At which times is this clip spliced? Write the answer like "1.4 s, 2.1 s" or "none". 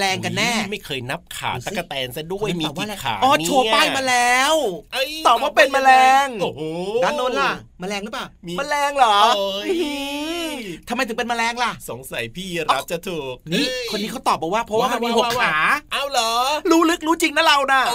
7.7 s

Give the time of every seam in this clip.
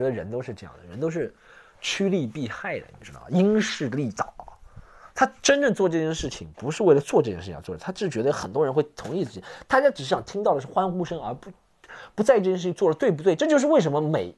none

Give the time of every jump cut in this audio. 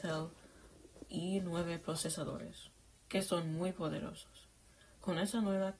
none

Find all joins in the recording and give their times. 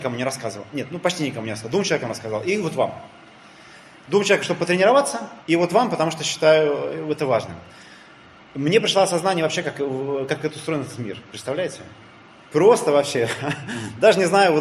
5.4 s

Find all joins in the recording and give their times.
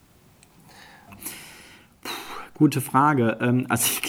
1.1 s

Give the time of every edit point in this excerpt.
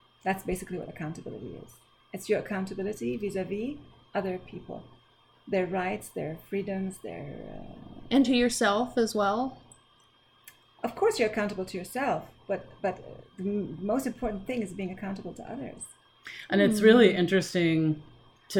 none

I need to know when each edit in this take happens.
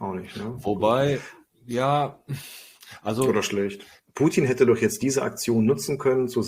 4.0 s

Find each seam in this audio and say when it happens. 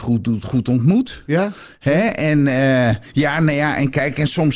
none

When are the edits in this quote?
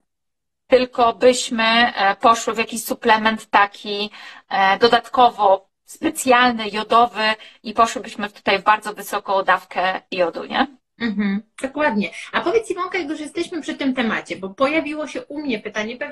none

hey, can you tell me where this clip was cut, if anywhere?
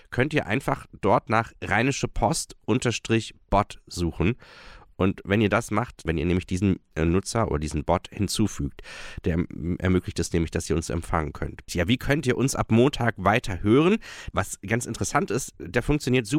6.1 s, 11.7 s, 14.3 s

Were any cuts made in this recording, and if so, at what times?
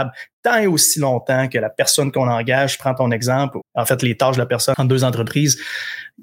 3.6 s, 4.7 s

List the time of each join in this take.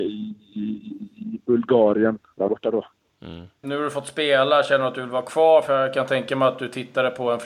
2.4 s, 3.6 s

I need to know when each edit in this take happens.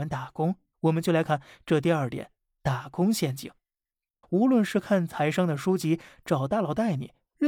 1.3 s, 4.2 s

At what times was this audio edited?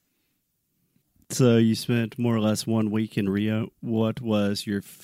1.0 s

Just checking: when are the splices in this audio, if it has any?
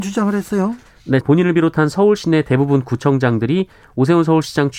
1.2 s

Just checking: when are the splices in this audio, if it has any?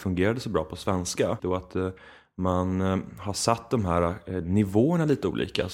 1.4 s

